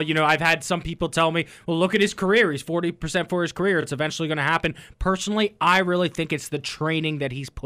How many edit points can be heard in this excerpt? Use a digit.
0